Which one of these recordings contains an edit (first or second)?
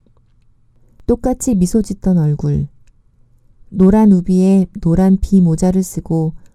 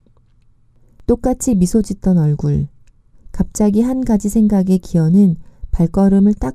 second